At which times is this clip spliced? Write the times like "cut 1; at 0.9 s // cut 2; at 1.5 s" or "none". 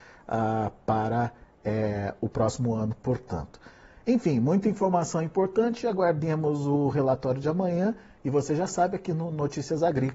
none